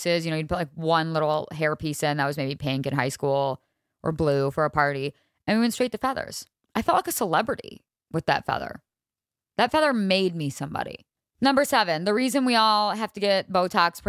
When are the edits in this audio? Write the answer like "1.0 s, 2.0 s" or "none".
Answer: none

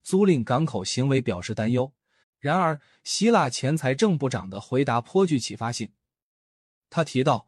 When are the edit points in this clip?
2.2 s

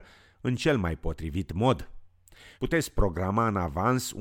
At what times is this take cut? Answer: 2.5 s

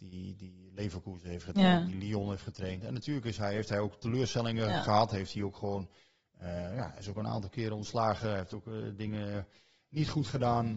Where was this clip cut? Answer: none

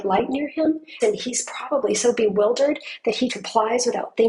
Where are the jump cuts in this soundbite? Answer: 1.0 s, 3.3 s

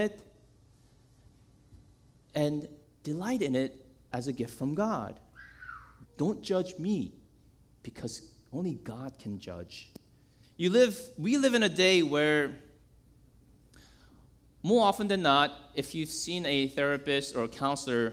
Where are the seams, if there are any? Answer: 6.1 s, 10.4 s

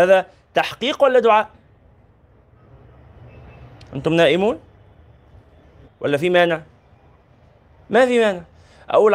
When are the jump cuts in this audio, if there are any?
5.8 s

